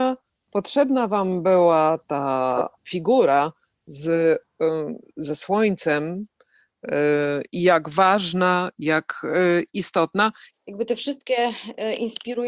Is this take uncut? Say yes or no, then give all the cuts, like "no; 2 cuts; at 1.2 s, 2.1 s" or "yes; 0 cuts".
no; 1 cut; at 10.5 s